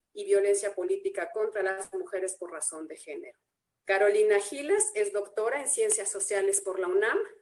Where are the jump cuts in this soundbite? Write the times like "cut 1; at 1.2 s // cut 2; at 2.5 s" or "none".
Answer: cut 1; at 3.7 s